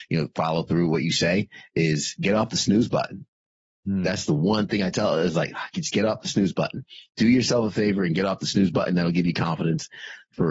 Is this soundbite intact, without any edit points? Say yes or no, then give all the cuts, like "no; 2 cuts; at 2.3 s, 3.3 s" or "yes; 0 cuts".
yes; 0 cuts